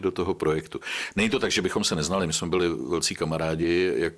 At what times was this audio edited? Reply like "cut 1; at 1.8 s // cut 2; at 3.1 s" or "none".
none